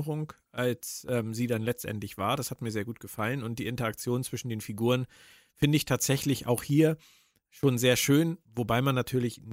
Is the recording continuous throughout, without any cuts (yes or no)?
no